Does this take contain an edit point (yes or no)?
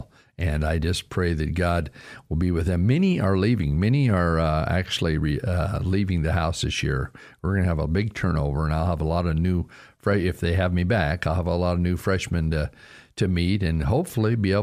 no